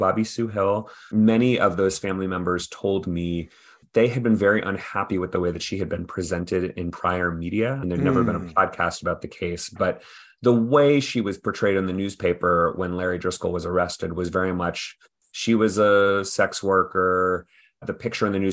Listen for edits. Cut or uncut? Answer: uncut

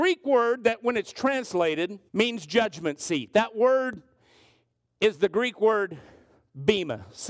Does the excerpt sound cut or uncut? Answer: cut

